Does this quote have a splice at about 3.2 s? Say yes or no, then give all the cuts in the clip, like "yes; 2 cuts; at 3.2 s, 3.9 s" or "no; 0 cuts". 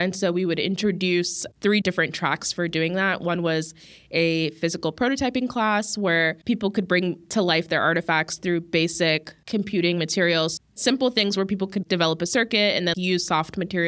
no; 2 cuts; at 10.6 s, 12.9 s